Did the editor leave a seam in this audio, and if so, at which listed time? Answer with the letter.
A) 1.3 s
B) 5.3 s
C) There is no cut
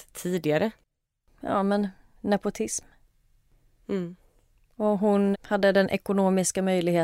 B